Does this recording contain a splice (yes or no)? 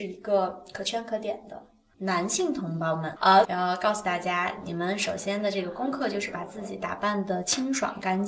yes